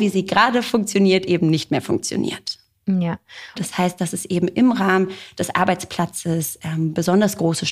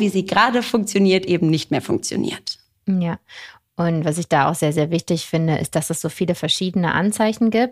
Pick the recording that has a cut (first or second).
first